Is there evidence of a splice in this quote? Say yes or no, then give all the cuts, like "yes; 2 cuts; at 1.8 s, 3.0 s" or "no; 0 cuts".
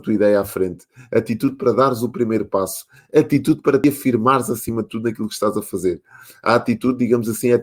no; 0 cuts